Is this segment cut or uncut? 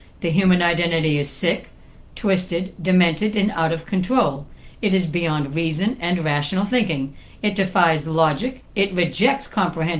uncut